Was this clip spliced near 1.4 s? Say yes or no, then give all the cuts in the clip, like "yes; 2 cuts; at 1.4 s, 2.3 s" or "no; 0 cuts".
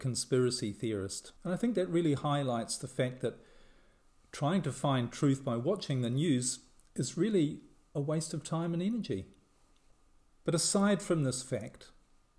yes; 1 cut; at 1.4 s